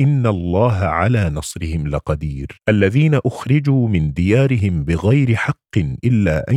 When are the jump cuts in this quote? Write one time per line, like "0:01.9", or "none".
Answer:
0:02.6